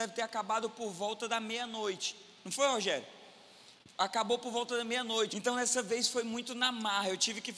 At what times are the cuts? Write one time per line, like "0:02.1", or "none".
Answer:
0:05.3